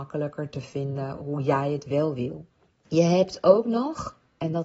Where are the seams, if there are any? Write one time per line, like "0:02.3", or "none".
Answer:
0:02.8